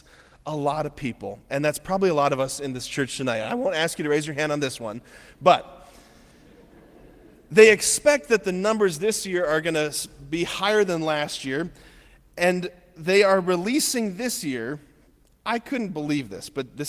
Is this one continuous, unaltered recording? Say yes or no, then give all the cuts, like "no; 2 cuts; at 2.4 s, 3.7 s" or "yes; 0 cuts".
yes; 0 cuts